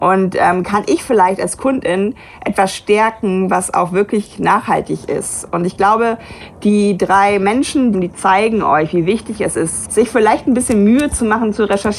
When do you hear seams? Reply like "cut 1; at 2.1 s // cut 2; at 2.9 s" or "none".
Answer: cut 1; at 7.9 s // cut 2; at 9.8 s